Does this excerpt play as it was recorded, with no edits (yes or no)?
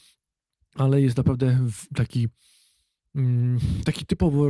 yes